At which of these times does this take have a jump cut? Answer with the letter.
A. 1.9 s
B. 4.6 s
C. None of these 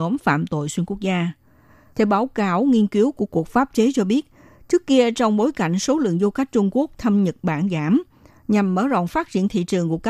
A